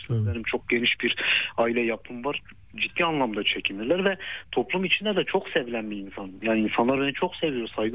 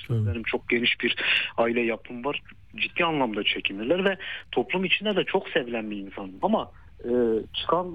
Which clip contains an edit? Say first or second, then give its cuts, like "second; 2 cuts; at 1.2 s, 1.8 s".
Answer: second; 1 cut; at 6.4 s